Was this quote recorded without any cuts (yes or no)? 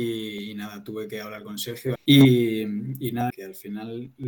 no